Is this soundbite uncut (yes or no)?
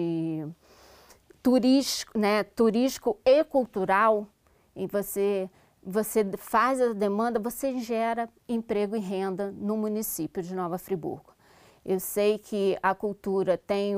yes